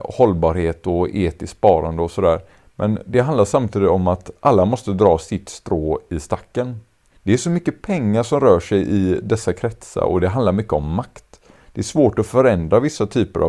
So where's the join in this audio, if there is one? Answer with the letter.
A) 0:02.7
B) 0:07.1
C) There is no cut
B